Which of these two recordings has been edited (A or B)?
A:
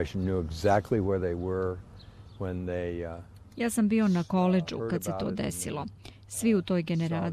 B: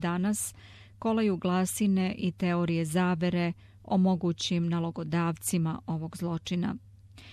A